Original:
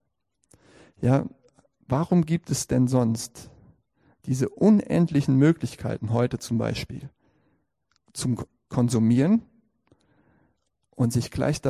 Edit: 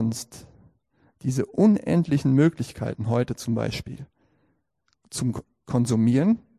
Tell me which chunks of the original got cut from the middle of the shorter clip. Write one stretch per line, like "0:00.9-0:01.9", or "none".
none